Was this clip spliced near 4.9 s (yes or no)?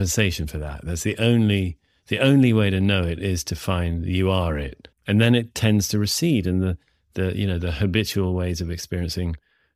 yes